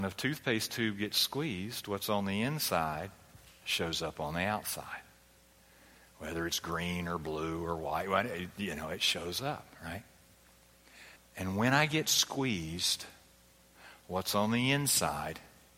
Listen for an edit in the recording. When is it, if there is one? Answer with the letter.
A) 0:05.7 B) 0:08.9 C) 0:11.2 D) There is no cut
C